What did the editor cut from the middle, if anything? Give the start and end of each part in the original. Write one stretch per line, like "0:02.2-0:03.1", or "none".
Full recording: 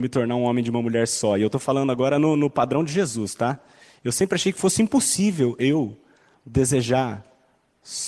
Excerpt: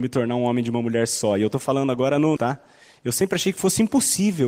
0:02.4-0:03.4